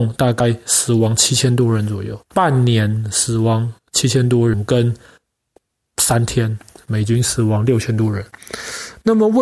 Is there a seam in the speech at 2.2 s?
yes; 1 cut; at 2.2 s

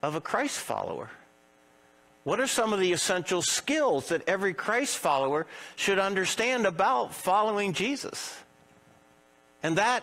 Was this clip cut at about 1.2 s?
no; 0 cuts

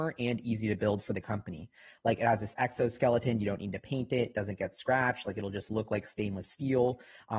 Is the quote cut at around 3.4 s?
no; 0 cuts

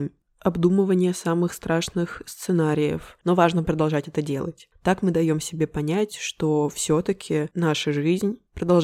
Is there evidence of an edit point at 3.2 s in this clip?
yes; 1 cut; at 3.2 s

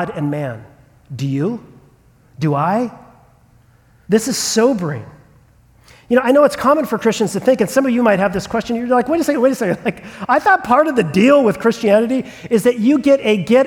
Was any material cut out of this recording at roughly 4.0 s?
yes; 1 cut; at 4.0 s

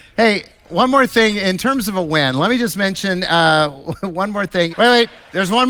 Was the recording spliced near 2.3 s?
no; 1 cut; at 4.7 s

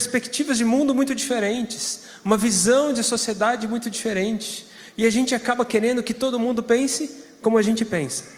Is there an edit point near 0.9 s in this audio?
no; 0 cuts

